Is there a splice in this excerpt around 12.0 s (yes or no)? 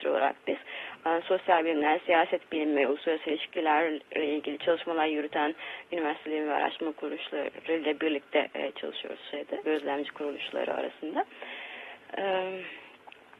no